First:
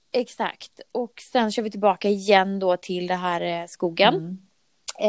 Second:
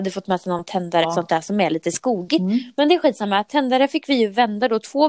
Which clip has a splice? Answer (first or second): second